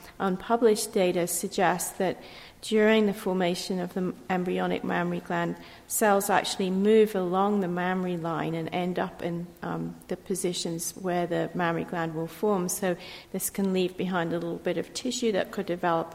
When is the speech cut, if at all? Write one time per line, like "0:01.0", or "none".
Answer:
0:13.2